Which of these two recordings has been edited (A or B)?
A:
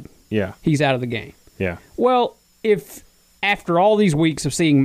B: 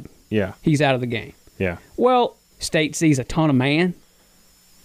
B